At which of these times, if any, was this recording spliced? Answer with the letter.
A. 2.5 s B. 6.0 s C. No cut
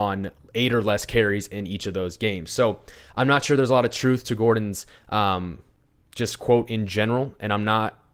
C